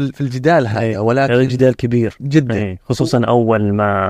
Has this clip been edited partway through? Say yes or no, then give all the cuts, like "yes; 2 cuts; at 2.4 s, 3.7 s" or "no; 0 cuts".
no; 0 cuts